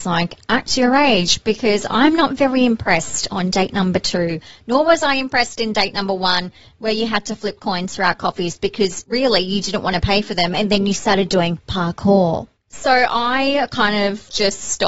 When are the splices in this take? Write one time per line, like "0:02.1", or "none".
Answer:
none